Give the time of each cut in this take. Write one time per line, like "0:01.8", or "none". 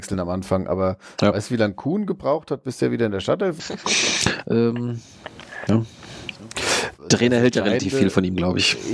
0:03.6
0:05.7
0:07.0

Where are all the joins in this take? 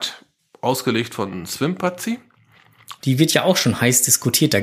0:03.0

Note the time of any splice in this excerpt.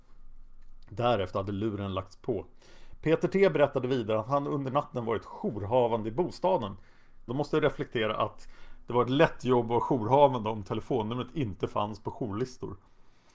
0:07.3

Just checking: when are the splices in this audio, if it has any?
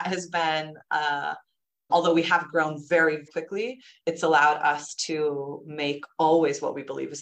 0:01.9
0:03.3

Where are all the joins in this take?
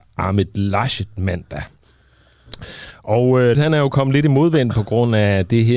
0:03.5

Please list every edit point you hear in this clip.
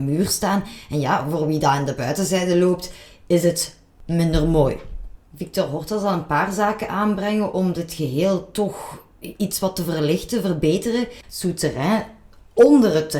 0:05.2
0:11.2

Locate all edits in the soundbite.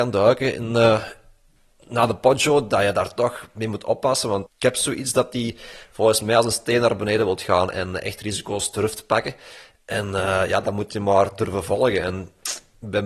0:04.5

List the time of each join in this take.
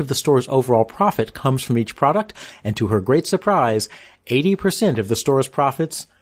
none

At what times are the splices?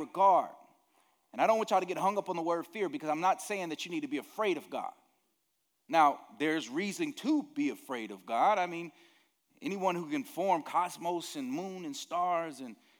none

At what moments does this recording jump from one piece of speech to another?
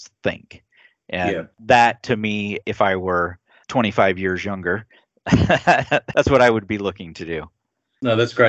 0:01.5

